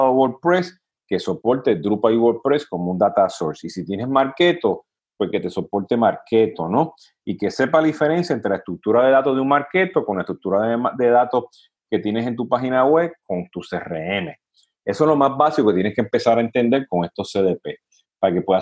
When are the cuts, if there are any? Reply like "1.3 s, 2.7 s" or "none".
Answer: none